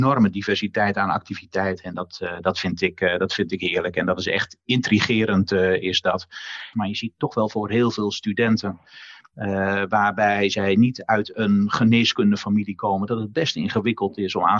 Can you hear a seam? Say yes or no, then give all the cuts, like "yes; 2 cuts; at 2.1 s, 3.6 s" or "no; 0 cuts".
yes; 1 cut; at 6.7 s